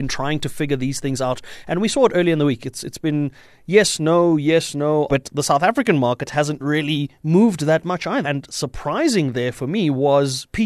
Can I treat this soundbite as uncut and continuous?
no; 2 cuts; at 5.1 s, 8.2 s

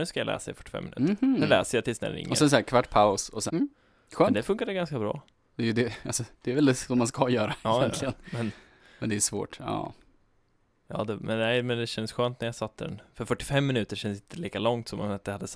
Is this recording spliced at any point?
yes; 1 cut; at 3.5 s

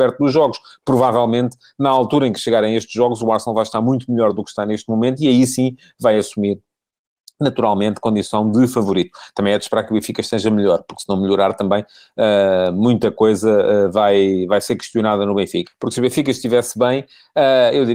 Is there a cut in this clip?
yes; 1 cut; at 15.7 s

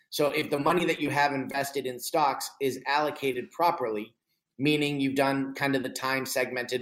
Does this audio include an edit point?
no; 0 cuts

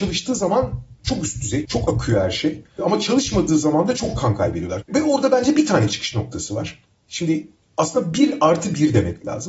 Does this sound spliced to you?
yes; 2 cuts; at 1.6 s, 4.8 s

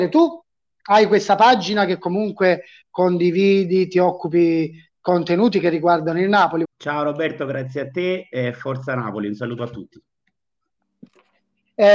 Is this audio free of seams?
no; 1 cut; at 6.6 s

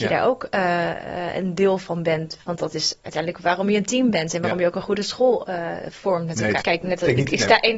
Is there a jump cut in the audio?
yes; 1 cut; at 6.6 s

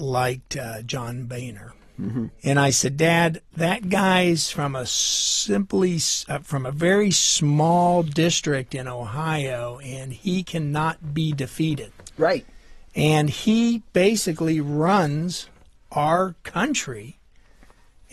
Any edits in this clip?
yes; 1 cut; at 2.4 s

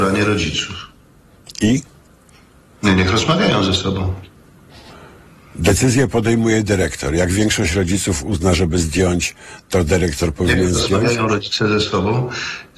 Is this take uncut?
yes; 0 cuts

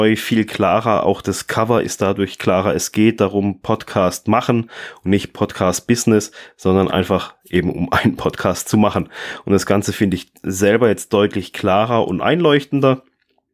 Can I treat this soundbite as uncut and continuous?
yes; 0 cuts

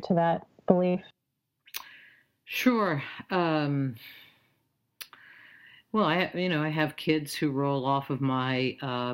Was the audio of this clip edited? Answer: no; 0 cuts

